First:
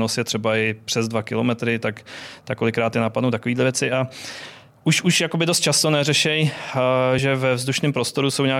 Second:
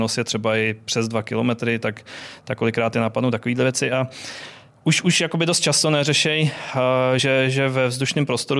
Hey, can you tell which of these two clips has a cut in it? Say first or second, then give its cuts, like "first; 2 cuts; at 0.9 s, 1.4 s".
first; 1 cut; at 7.2 s